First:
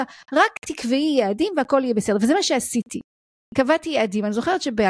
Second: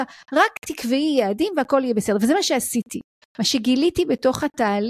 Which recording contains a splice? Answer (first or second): second